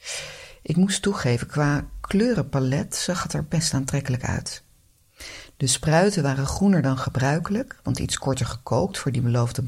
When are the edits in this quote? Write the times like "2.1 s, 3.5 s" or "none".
none

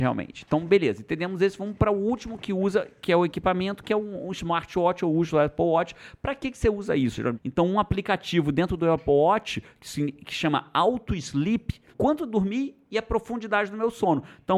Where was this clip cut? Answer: 7.3 s, 11.9 s

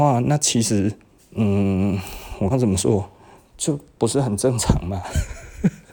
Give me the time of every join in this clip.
2.5 s

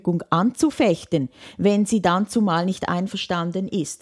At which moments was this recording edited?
none

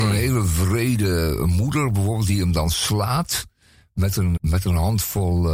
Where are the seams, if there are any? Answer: 4.4 s

